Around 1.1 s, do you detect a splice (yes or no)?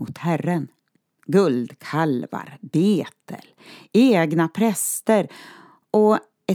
yes